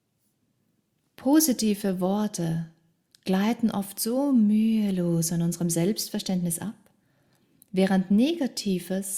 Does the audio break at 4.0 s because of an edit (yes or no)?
no